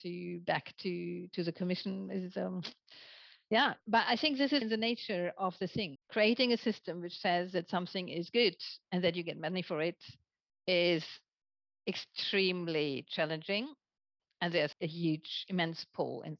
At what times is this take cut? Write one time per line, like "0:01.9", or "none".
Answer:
0:04.6
0:06.0
0:14.7